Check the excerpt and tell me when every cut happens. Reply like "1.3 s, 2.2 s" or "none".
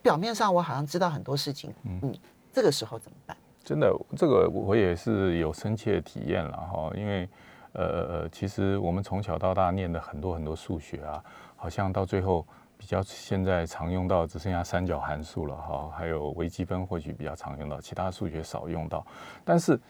1.7 s